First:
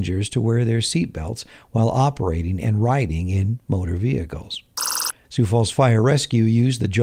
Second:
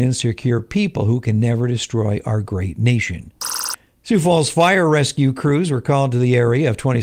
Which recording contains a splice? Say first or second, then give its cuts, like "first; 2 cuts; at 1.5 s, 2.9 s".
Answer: first; 1 cut; at 5.2 s